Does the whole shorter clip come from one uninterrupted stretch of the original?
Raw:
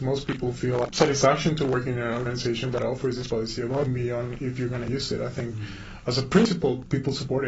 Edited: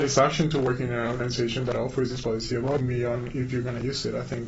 yes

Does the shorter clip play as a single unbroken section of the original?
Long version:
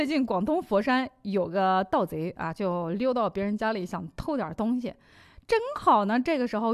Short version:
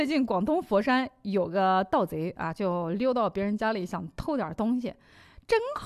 yes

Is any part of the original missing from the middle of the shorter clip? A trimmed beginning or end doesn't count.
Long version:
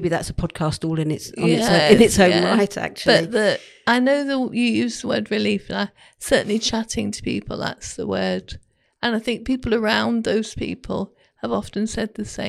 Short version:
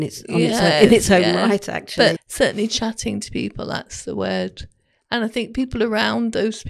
yes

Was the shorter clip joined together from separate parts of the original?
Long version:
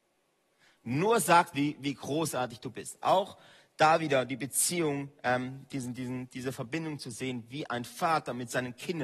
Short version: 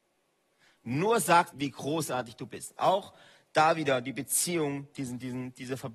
yes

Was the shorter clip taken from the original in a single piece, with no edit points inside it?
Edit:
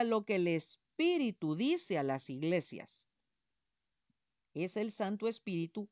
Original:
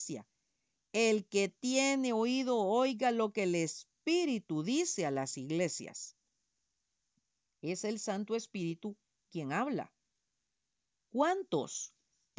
yes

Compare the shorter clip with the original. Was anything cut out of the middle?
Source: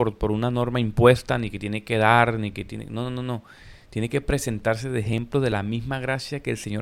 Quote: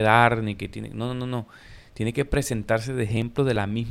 no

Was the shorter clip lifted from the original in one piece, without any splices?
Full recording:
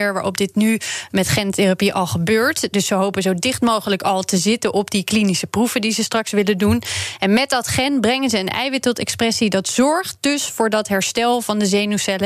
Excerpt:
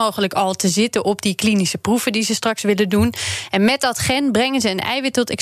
yes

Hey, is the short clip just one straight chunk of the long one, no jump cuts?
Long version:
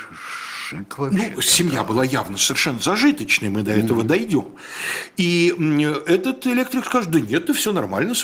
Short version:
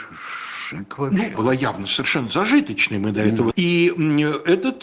no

